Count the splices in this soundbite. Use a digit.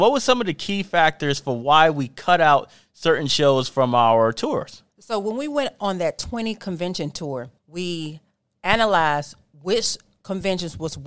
2